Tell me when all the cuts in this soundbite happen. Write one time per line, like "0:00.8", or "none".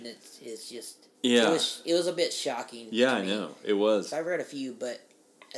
0:01.1
0:04.1